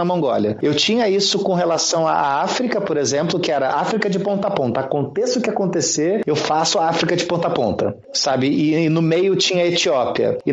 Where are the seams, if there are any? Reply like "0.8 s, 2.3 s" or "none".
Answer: none